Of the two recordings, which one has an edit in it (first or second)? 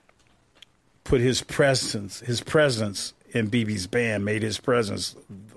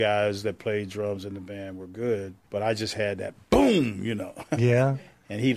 second